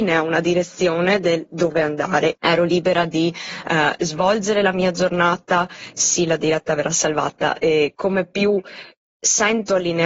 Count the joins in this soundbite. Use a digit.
2